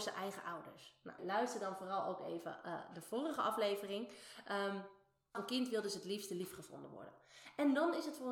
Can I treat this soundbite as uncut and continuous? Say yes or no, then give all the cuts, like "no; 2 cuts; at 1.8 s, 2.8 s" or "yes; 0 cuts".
no; 2 cuts; at 1.2 s, 5.3 s